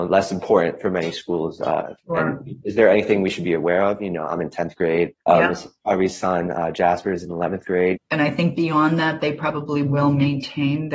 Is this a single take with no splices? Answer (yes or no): no